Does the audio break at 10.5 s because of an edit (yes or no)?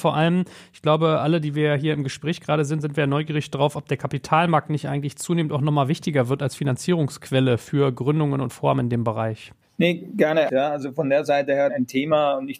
yes